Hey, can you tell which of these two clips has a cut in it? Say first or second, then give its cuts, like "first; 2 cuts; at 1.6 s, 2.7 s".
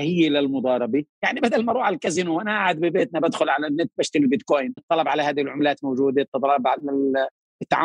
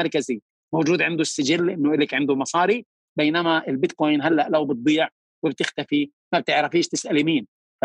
first; 2 cuts; at 1.1 s, 4.8 s